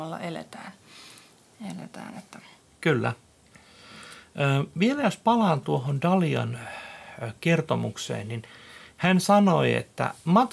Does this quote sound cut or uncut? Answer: cut